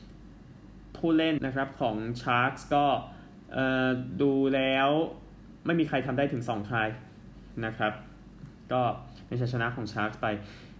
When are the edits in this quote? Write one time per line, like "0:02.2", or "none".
0:01.4